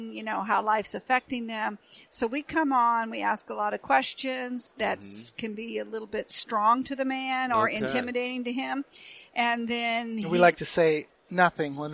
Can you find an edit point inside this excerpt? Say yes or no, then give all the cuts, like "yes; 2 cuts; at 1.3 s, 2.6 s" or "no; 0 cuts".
no; 0 cuts